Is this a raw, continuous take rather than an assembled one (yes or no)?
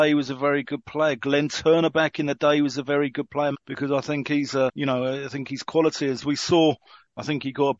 no